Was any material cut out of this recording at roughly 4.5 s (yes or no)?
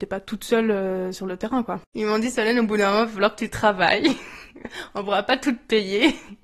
no